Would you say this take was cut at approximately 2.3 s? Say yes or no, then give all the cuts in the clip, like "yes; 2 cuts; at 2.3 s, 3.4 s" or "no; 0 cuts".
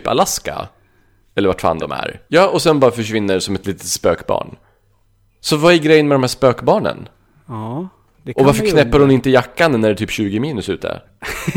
yes; 1 cut; at 2.3 s